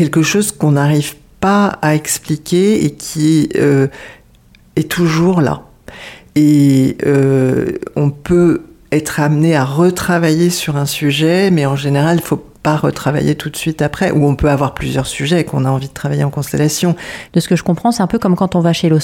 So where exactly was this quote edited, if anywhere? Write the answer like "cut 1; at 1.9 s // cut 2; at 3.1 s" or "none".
cut 1; at 12.5 s // cut 2; at 17.3 s